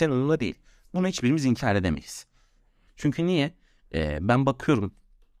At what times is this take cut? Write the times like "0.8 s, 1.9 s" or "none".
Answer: 2.9 s